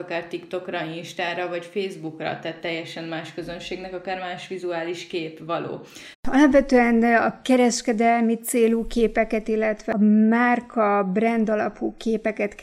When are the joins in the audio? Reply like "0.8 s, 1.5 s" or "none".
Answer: 6.1 s